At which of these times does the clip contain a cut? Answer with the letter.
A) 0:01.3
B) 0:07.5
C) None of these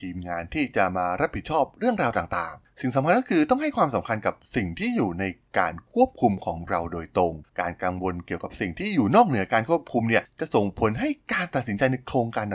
B